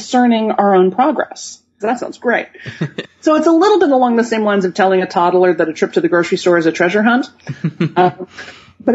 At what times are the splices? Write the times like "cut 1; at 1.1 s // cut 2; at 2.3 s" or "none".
cut 1; at 1.8 s // cut 2; at 3.0 s